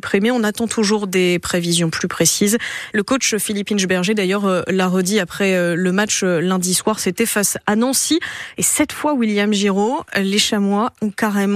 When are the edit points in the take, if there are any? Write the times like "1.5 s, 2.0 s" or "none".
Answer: 2.9 s